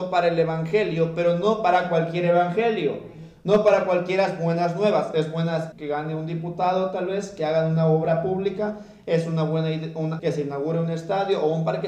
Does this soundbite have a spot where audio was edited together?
yes; 2 cuts; at 5.7 s, 10.2 s

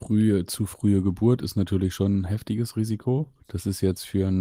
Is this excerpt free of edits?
no; 1 cut; at 3.4 s

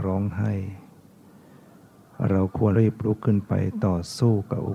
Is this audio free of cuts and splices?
no; 1 cut; at 2.7 s

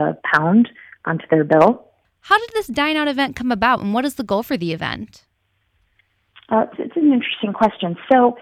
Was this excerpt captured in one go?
no; 1 cut; at 2.0 s

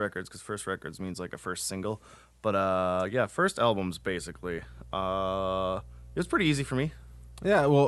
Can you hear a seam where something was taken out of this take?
no; 0 cuts

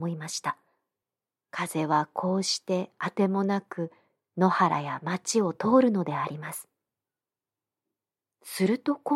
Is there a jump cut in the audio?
no; 0 cuts

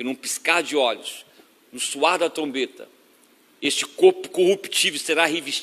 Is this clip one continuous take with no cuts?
yes; 0 cuts

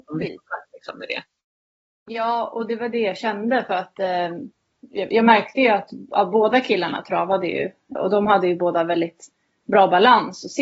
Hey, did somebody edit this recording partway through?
yes; 1 cut; at 7.9 s

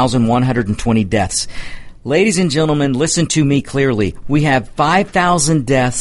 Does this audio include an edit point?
yes; 1 cut; at 4.2 s

